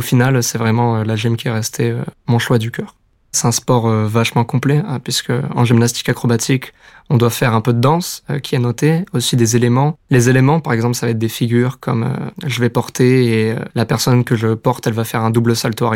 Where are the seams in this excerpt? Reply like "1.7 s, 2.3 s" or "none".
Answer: none